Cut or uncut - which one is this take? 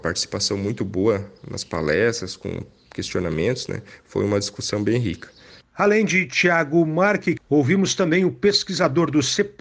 cut